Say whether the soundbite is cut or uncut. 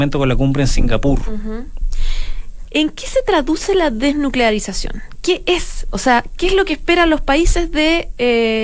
cut